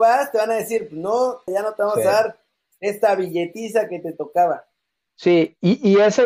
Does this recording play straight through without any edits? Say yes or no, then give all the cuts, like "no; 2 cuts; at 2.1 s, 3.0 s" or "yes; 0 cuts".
no; 1 cut; at 1.5 s